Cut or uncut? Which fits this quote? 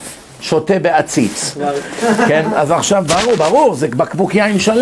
uncut